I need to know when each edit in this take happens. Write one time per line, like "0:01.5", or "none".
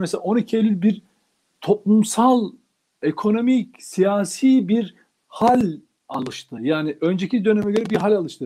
none